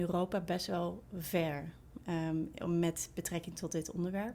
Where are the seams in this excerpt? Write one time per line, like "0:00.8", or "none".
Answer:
none

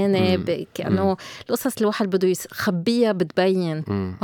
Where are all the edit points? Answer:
none

